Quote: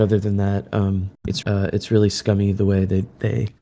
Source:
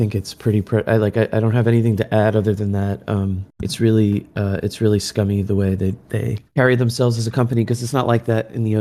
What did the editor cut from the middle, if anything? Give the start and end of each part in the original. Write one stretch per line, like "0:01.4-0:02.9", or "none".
0:03.8-0:04.3